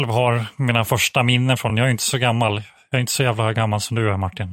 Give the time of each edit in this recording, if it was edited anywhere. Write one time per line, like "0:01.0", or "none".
none